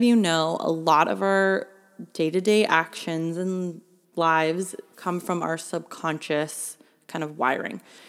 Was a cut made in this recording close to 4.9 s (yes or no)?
yes